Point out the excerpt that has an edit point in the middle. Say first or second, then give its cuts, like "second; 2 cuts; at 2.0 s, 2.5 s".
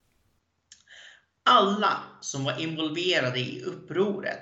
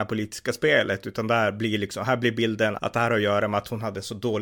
second; 1 cut; at 2.8 s